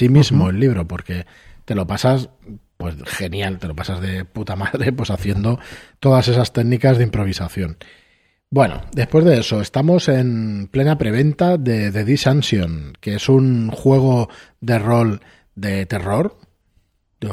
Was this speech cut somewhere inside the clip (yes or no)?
no